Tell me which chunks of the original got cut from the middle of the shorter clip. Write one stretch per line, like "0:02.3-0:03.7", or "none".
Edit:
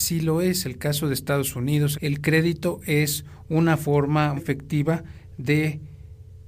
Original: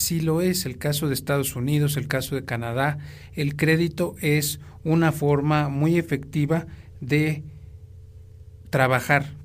0:01.9-0:03.3
0:05.7-0:06.0